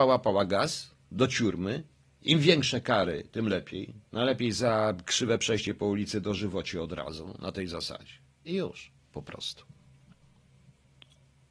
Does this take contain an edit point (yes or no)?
no